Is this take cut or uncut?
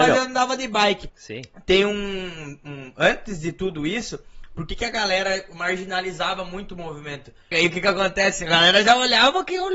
cut